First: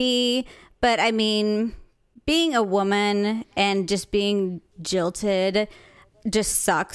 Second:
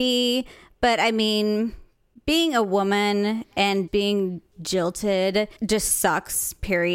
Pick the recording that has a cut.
second; 2 cuts; at 3.9 s, 5.6 s

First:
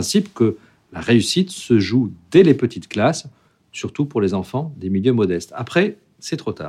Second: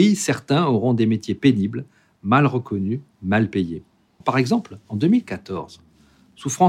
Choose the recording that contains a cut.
second; 1 cut; at 4.2 s

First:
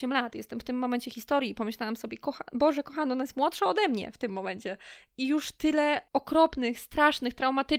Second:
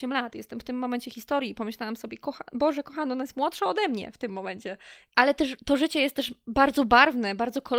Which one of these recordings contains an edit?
second; 1 cut; at 5.1 s

